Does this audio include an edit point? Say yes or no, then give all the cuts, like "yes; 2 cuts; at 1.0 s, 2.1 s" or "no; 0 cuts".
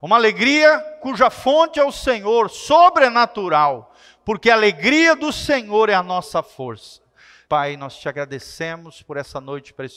yes; 1 cut; at 7.5 s